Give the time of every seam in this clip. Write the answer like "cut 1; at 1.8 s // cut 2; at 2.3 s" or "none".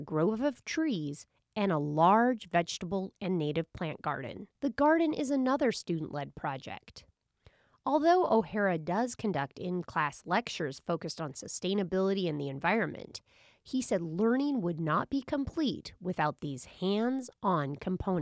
cut 1; at 4.6 s